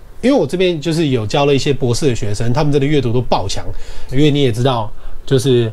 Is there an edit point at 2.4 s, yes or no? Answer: no